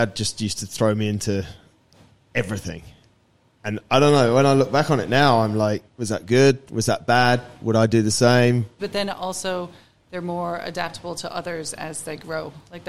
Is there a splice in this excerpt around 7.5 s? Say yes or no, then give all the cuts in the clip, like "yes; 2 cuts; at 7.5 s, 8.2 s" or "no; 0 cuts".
no; 2 cuts; at 5.9 s, 8.8 s